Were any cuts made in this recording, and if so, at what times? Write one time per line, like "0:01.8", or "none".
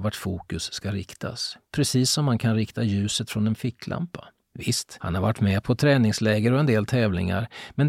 0:04.4